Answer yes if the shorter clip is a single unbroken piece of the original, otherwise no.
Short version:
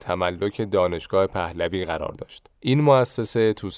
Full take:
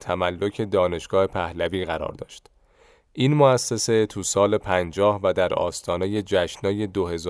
no